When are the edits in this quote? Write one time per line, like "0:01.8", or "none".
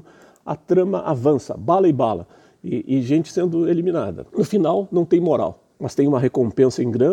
0:05.7